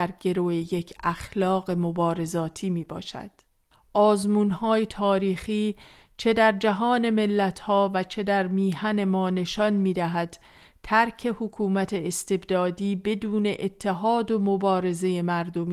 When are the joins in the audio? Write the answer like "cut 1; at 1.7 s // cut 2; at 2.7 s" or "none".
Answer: cut 1; at 3.7 s